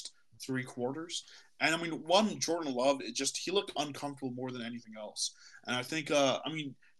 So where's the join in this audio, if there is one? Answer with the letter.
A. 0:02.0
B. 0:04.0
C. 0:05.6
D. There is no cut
A